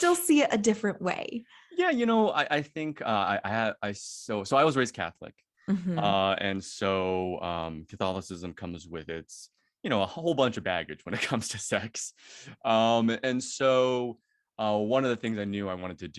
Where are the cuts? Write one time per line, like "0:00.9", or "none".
none